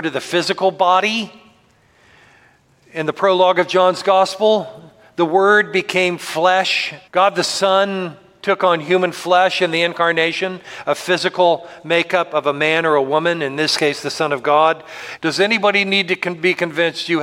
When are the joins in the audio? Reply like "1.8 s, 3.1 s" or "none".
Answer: 7.1 s, 15.2 s